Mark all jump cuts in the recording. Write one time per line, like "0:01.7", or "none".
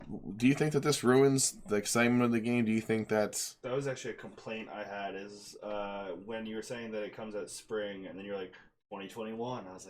none